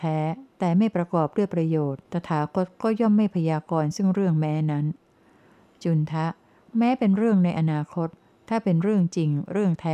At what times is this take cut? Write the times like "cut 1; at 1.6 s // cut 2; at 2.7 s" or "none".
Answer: cut 1; at 2.1 s